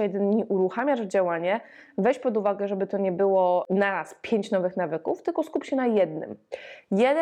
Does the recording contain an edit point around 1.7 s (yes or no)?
no